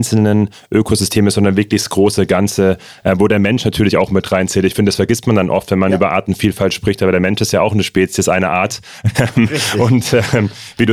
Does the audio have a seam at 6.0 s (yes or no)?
no